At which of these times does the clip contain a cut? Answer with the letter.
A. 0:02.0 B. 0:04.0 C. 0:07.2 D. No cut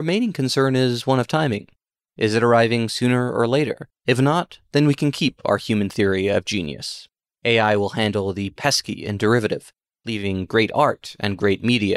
B